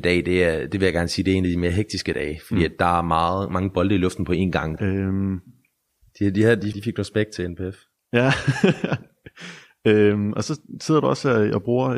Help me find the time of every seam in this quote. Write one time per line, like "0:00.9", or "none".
0:04.8
0:06.7